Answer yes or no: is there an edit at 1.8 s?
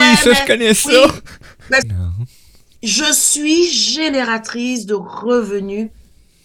yes